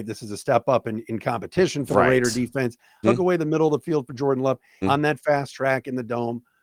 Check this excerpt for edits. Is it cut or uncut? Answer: cut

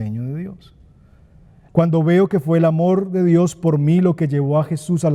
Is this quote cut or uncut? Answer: cut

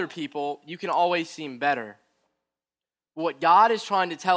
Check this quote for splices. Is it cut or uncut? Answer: uncut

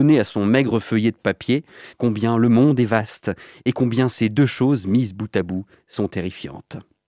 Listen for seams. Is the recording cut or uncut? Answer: cut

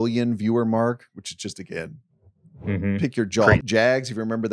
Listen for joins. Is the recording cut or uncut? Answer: cut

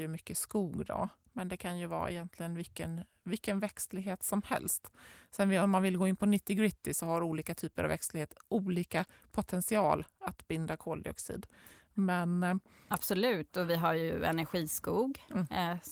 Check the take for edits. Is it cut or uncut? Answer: uncut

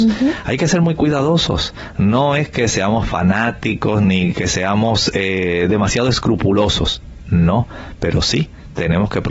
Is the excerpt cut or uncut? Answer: uncut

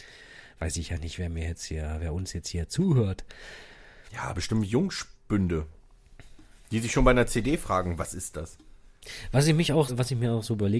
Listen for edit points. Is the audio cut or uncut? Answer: cut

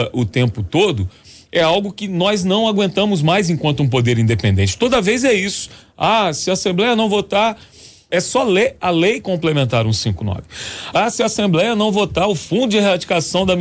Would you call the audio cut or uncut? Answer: cut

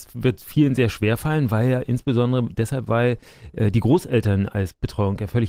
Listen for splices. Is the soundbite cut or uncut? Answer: uncut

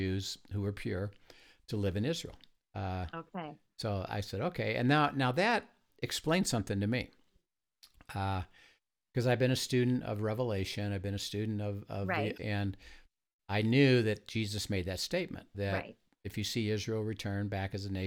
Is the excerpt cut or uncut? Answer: cut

